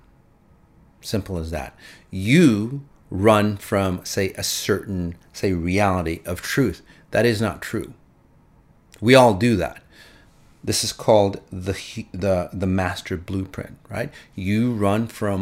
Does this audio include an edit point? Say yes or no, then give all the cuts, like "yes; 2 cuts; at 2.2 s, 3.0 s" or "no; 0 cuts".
no; 0 cuts